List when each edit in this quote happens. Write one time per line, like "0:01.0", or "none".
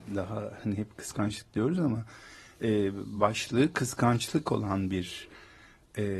none